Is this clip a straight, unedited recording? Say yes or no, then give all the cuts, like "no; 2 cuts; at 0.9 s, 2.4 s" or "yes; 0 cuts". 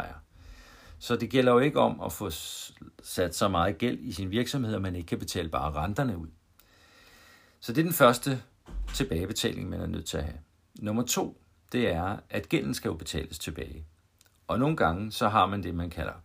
yes; 0 cuts